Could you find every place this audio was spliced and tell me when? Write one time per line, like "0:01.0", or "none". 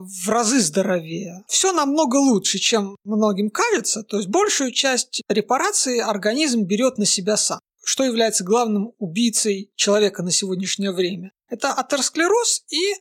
0:01.5